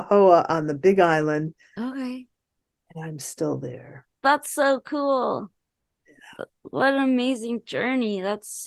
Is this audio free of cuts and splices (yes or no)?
yes